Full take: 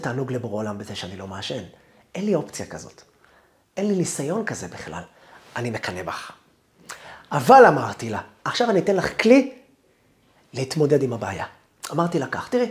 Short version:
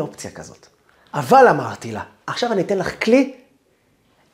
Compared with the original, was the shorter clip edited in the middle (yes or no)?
yes